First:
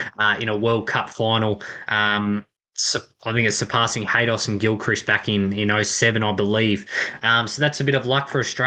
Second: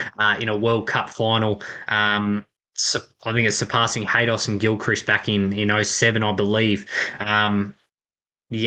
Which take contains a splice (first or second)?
first